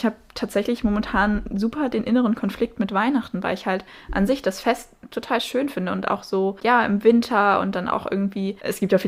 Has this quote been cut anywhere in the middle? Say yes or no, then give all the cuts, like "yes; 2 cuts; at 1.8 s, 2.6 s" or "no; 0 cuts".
no; 0 cuts